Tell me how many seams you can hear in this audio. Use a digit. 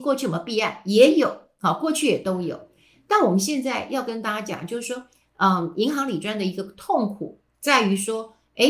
0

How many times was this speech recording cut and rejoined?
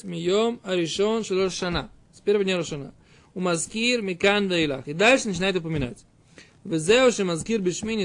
0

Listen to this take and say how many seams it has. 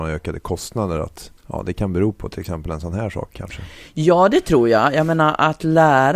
1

